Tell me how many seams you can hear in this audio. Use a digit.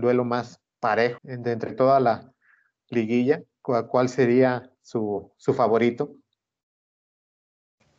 1